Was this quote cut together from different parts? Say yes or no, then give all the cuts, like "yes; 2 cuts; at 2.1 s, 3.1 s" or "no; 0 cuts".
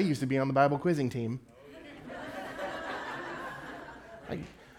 no; 0 cuts